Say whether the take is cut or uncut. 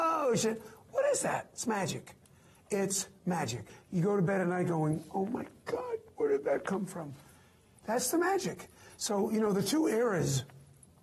uncut